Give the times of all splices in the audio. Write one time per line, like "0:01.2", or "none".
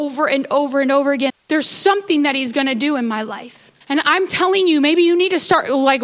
0:01.3
0:03.8